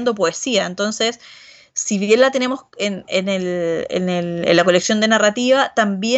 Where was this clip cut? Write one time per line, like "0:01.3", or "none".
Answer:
none